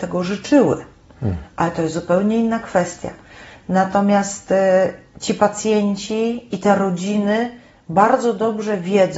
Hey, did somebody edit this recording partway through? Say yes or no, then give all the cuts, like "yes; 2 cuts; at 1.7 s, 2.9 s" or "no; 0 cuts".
no; 0 cuts